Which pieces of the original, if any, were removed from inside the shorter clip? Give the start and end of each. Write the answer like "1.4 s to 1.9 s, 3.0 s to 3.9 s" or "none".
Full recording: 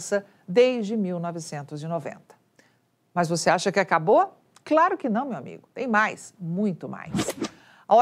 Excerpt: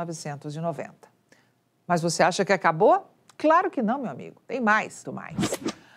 6.3 s to 6.8 s